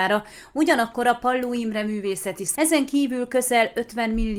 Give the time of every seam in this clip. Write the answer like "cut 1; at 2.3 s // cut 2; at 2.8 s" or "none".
cut 1; at 2.5 s